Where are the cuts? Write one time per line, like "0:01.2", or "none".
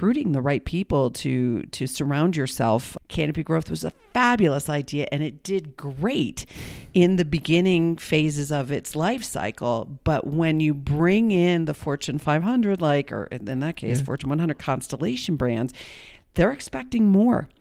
0:03.0